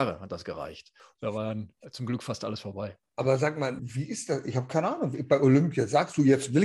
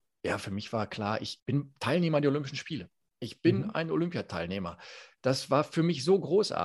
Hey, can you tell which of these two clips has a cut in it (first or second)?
first